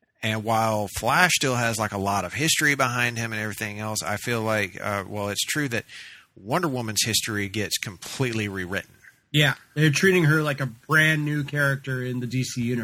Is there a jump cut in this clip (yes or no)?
no